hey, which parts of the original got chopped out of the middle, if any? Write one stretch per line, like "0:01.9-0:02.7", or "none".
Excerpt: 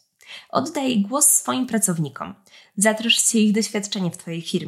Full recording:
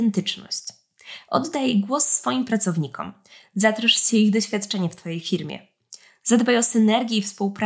none